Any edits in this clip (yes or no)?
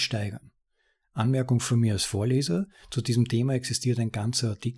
no